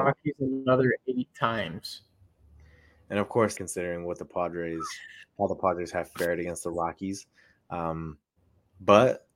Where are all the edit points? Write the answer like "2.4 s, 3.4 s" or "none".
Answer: 3.6 s